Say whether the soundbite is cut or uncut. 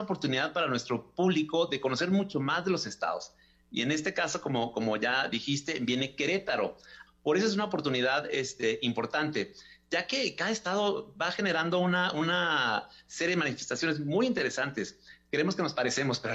cut